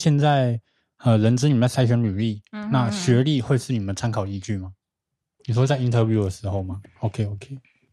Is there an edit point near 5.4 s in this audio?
yes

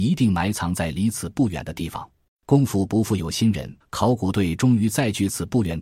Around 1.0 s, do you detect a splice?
no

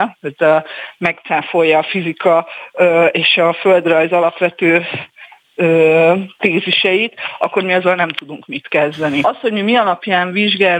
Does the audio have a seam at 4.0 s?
no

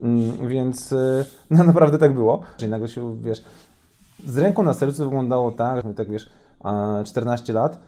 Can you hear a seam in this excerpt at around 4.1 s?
no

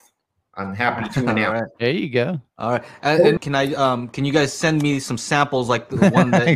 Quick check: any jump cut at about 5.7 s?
no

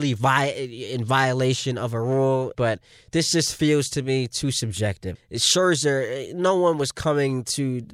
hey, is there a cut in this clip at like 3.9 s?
no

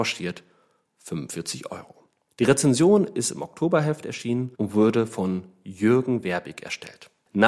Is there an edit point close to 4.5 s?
yes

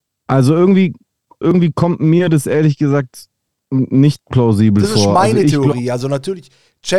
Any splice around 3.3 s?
no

